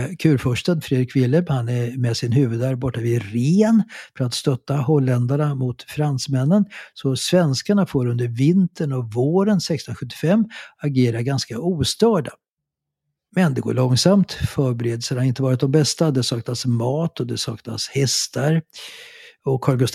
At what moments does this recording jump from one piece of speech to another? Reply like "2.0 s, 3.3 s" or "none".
none

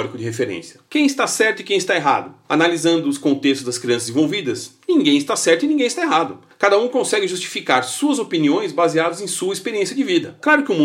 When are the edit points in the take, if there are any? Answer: none

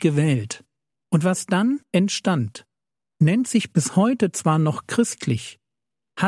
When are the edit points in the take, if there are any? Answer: 0.9 s

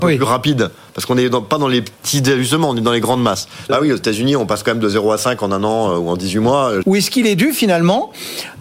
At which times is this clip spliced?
3.7 s, 6.8 s

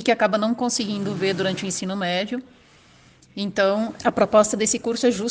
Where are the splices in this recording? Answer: 4.0 s

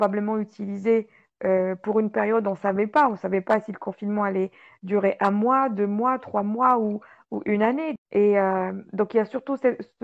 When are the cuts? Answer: 8.0 s

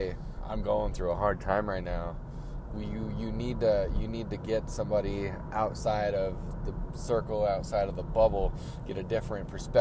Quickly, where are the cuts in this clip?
2.7 s

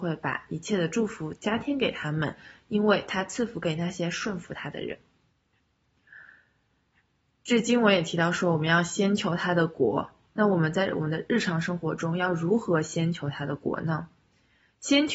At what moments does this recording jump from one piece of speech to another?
none

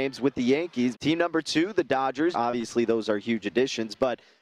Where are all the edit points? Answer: 0.9 s, 2.3 s

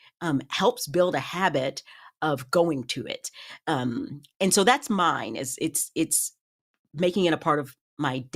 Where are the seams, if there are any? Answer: none

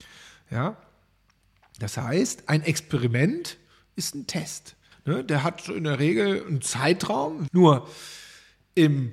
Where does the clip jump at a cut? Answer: 4.9 s, 7.5 s

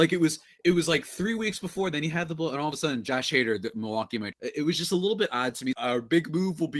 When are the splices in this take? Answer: 4.3 s, 5.7 s

